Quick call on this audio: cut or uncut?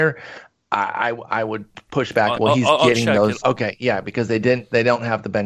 cut